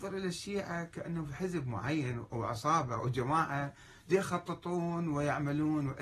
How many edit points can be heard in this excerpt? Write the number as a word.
zero